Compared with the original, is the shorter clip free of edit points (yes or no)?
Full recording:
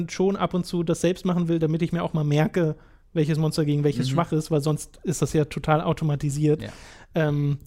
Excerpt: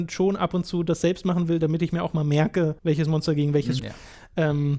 no